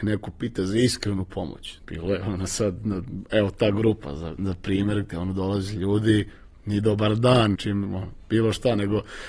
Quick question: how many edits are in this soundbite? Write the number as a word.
two